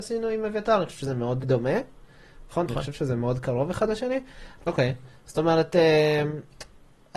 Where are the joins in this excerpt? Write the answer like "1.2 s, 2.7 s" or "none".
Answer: 1.4 s, 2.7 s, 4.6 s